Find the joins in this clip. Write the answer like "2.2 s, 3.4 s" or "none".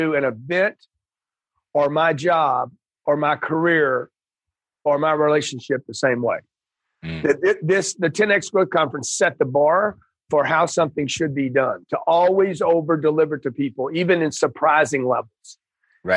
none